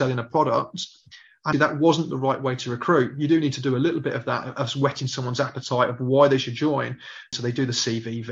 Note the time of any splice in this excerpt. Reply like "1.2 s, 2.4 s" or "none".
1.5 s, 7.3 s